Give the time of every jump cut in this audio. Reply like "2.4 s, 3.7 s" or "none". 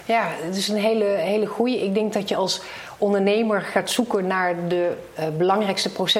none